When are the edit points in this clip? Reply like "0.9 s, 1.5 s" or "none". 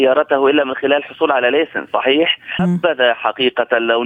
2.6 s